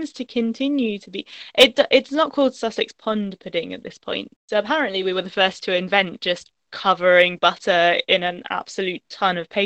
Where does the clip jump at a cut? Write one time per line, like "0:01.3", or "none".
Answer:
0:04.4